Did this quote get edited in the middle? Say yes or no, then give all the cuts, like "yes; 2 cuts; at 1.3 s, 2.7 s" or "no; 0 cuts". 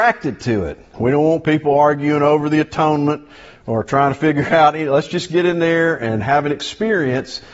yes; 1 cut; at 0.9 s